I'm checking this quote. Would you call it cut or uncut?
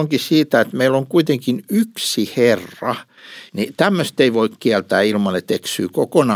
cut